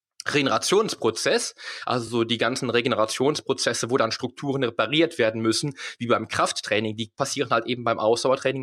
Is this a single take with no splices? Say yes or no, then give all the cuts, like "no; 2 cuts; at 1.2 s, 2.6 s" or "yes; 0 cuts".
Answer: yes; 0 cuts